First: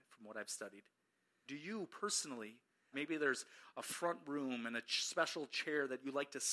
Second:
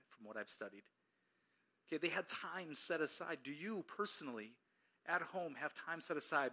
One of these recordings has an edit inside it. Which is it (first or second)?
first